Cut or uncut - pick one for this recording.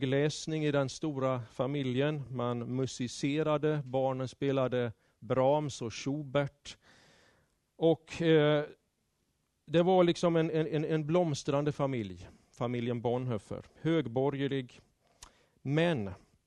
uncut